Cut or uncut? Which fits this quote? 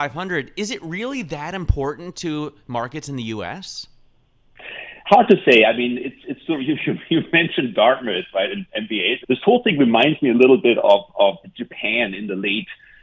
cut